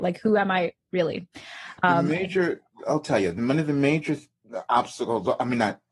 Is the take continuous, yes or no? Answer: yes